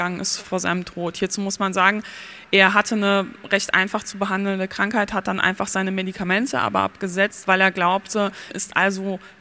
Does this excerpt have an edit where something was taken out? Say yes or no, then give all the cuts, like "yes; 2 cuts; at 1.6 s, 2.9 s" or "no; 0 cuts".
yes; 1 cut; at 8.5 s